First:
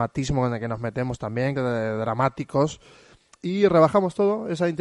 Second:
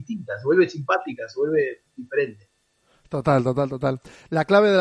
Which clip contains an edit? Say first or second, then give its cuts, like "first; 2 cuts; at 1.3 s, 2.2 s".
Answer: first; 1 cut; at 1.6 s